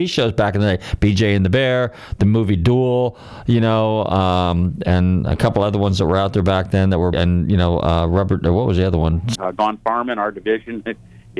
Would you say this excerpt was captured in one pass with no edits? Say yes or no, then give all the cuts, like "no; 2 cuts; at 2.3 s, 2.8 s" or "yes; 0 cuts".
no; 2 cuts; at 7.1 s, 9.4 s